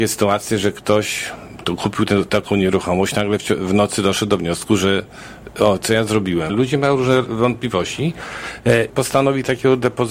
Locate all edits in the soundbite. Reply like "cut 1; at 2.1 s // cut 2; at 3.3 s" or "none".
cut 1; at 6.5 s // cut 2; at 8.9 s